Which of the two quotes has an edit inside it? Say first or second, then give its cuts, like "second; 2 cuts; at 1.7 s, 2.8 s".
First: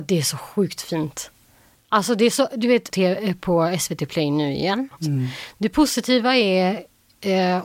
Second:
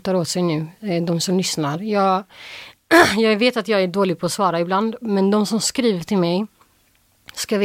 first; 2 cuts; at 2.9 s, 5.0 s